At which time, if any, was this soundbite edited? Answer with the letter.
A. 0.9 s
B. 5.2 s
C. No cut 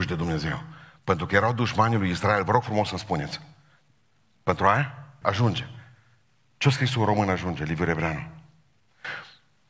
B